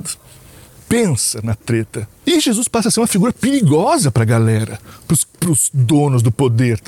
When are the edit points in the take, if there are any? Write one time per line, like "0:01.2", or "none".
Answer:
none